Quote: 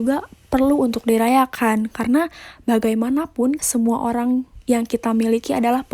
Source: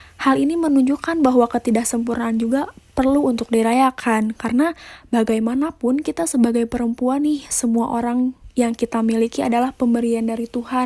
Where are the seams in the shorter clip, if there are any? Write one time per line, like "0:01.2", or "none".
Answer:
0:03.6